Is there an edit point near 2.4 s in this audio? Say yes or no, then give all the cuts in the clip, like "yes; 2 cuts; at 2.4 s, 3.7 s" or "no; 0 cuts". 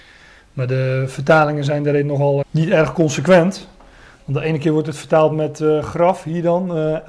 yes; 1 cut; at 2.4 s